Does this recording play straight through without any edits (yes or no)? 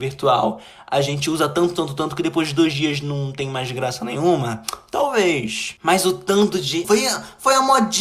no